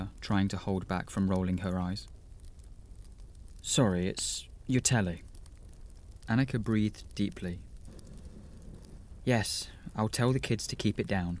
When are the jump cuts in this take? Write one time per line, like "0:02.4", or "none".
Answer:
0:04.6
0:09.2